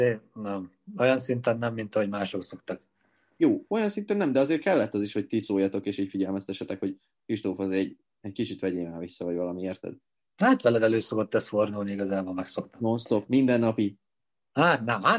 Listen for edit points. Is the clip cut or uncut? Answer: cut